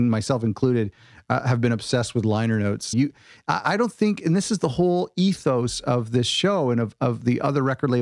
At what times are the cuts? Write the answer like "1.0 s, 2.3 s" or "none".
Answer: 2.9 s